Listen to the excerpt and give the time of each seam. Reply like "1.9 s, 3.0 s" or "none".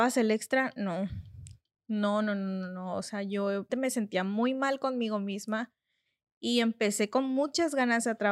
3.7 s